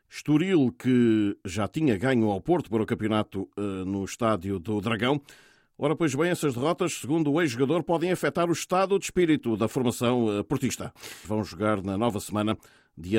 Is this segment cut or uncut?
cut